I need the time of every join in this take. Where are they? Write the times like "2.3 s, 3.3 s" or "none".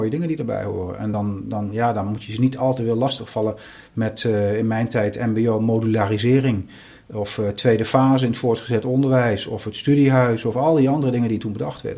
none